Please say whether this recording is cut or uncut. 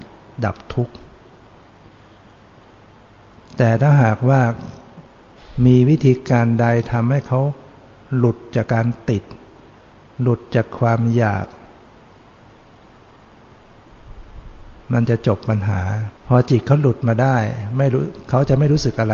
cut